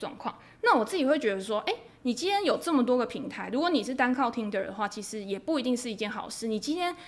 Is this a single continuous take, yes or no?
yes